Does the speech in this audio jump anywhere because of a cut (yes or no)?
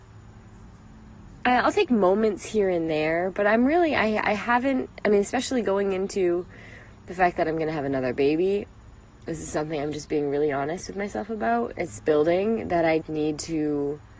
yes